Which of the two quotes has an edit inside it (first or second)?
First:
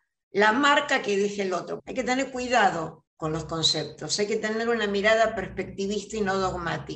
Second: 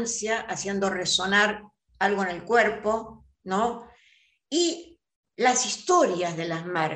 first